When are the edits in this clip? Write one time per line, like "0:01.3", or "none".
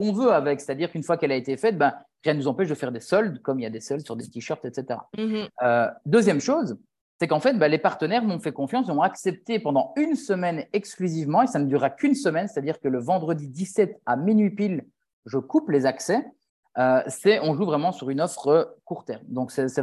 none